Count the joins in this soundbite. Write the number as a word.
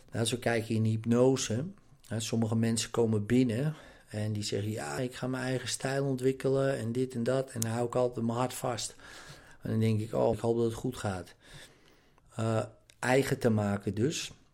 three